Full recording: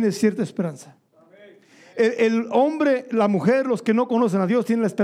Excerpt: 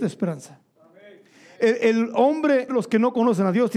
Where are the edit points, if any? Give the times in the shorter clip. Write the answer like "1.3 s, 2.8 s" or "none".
2.7 s

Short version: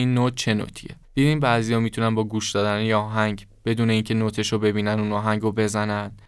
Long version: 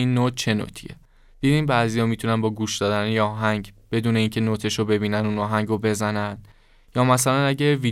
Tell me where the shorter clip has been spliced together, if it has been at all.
1.0 s

